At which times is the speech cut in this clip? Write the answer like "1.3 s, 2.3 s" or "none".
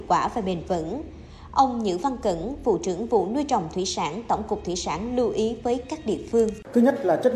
none